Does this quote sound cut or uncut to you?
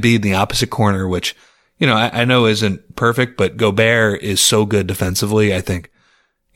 uncut